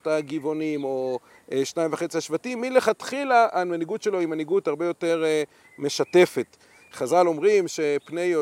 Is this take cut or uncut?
uncut